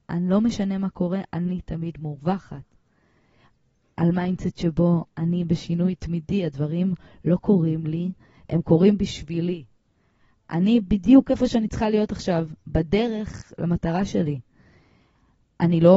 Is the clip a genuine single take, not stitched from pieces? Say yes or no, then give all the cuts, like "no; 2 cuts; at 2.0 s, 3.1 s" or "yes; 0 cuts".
yes; 0 cuts